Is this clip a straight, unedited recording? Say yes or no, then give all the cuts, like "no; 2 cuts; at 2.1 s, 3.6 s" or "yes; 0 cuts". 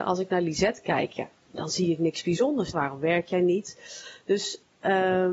no; 1 cut; at 2.7 s